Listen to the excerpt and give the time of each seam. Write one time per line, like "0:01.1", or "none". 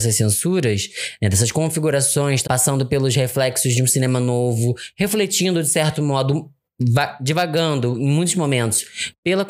0:02.4

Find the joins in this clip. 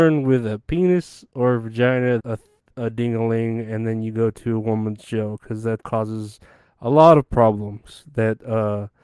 0:02.2
0:05.8

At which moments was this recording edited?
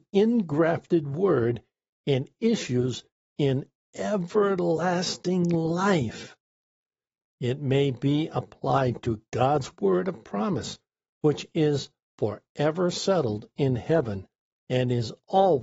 none

